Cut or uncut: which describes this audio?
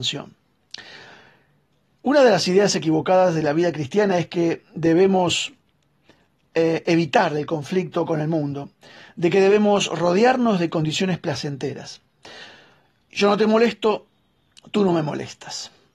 uncut